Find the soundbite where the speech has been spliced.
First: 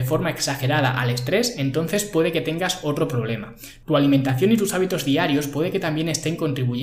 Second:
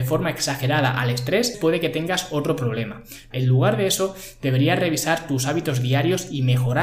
second; 2 cuts; at 1.5 s, 3.3 s

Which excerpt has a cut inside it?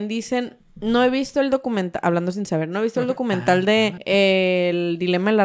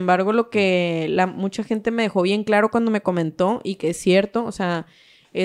first; 1 cut; at 4.0 s

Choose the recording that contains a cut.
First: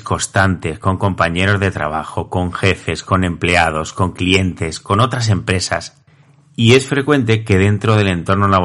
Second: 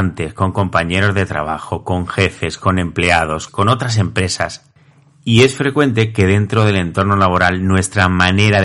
second; 1 cut; at 3.5 s

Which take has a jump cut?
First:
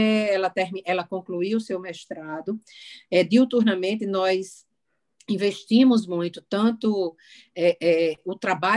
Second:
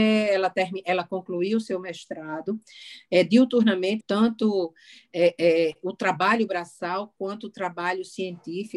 second; 1 cut; at 4.0 s

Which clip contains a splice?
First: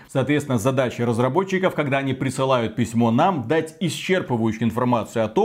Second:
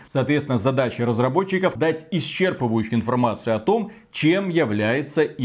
second; 1 cut; at 1.8 s

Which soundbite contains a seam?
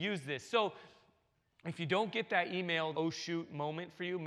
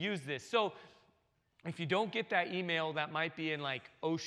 first; 1 cut; at 2.9 s

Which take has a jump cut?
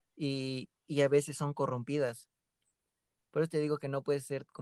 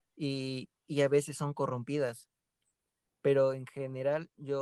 second; 1 cut; at 3.1 s

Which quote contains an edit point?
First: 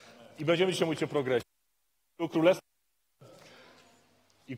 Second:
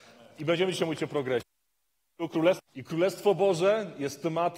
second; 1 cut; at 2.7 s

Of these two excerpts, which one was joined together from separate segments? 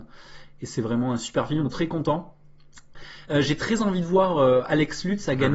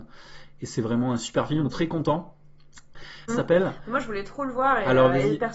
second; 1 cut; at 3.3 s

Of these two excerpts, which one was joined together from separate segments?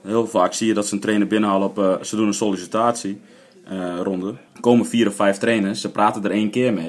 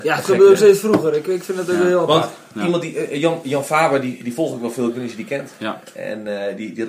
first; 1 cut; at 4.5 s

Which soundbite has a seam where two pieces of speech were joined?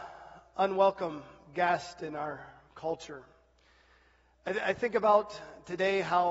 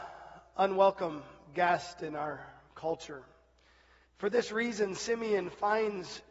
second; 1 cut; at 4.0 s

